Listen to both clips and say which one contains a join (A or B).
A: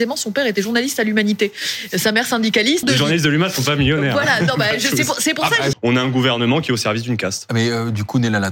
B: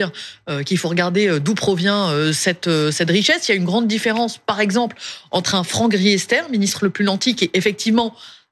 A